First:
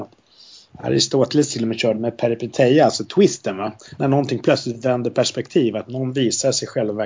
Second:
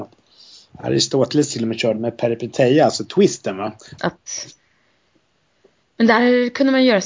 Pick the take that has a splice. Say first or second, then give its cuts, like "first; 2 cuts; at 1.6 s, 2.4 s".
second; 1 cut; at 4.0 s